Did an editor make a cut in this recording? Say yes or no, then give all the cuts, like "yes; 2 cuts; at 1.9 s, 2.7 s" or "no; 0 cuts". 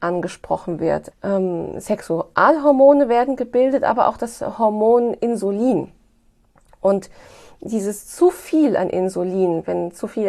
yes; 1 cut; at 1.1 s